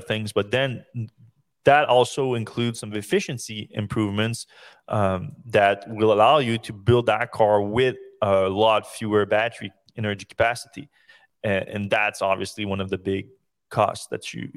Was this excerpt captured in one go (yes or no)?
yes